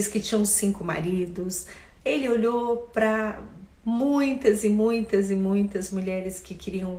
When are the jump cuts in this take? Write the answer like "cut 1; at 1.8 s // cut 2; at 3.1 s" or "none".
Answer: cut 1; at 5.9 s